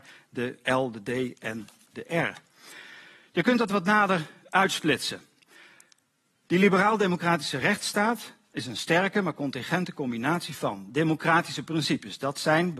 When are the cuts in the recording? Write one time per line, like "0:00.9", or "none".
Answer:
none